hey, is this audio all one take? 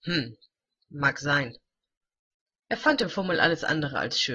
yes; 0 cuts

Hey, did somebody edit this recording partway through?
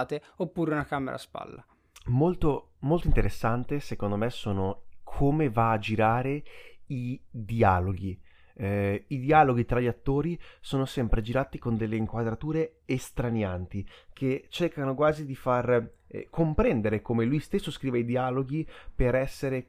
no; 0 cuts

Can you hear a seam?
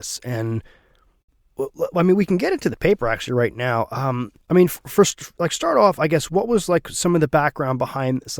yes; 1 cut; at 4.4 s

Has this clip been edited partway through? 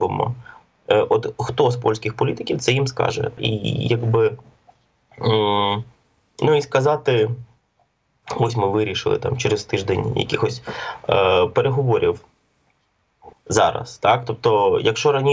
yes; 2 cuts; at 3.4 s, 13.3 s

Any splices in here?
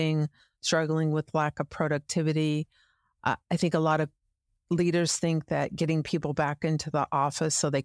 no; 0 cuts

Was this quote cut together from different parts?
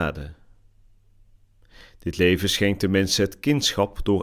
no; 0 cuts

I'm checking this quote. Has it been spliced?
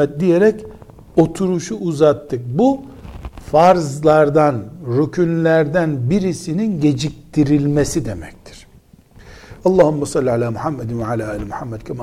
yes; 1 cut; at 9.6 s

